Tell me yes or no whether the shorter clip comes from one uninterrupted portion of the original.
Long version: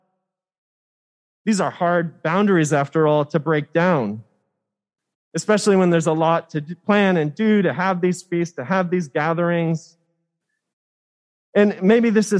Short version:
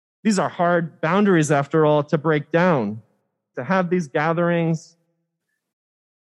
no